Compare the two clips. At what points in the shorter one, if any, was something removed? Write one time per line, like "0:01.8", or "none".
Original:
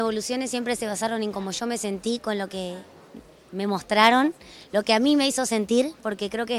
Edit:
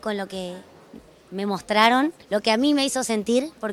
0:02.2